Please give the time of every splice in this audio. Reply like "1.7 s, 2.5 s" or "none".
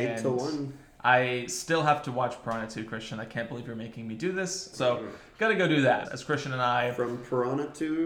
4.7 s, 6.0 s